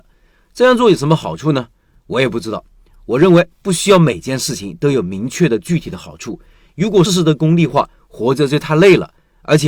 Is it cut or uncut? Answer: cut